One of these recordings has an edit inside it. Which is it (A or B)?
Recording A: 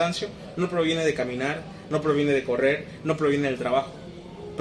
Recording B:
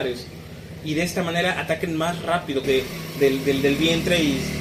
B